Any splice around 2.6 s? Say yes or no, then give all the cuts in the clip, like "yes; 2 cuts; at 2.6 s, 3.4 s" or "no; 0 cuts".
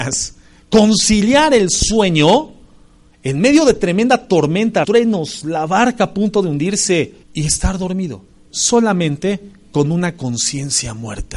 no; 2 cuts; at 4.8 s, 7.2 s